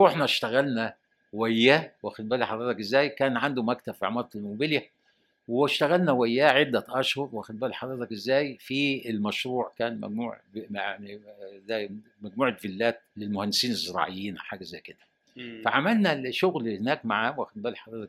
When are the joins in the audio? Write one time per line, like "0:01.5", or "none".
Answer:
0:02.0
0:13.1